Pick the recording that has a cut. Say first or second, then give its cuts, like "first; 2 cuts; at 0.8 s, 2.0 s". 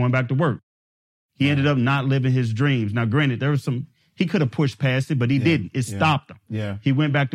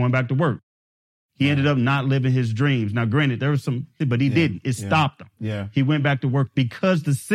second; 1 cut; at 4.0 s